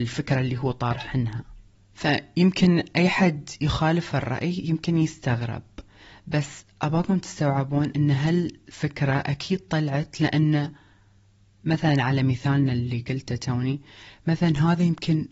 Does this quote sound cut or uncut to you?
uncut